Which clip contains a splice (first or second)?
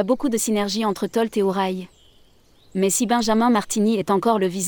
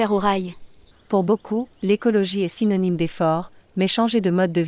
second